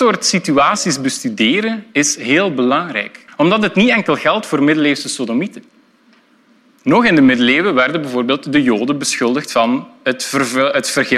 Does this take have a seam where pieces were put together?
yes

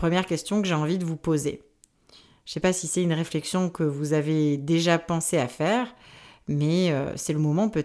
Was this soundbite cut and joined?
no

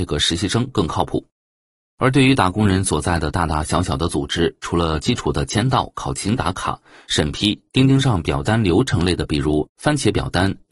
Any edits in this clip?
no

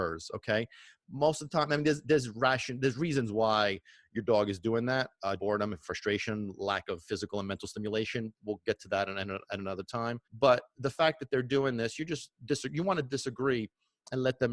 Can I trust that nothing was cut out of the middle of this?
no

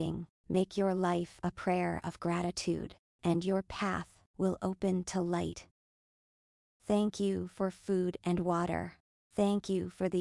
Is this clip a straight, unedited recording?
no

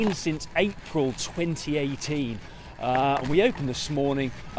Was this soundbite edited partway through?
no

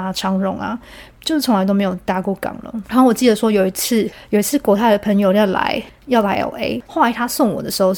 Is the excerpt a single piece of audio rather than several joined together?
no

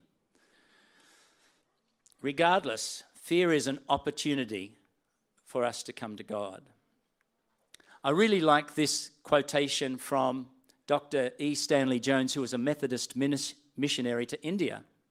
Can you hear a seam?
no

